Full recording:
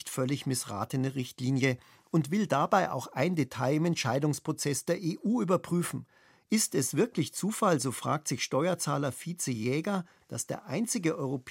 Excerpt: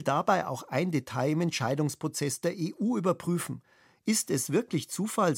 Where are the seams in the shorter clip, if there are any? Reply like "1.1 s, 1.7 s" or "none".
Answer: none